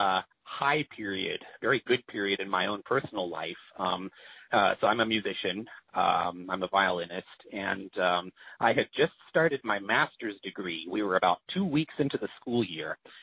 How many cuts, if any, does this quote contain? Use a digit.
1